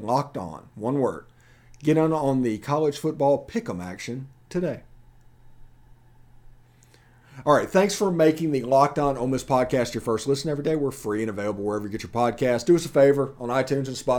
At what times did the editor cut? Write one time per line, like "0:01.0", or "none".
none